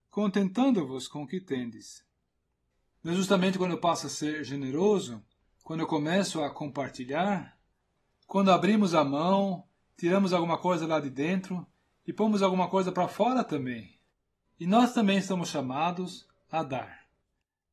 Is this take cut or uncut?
cut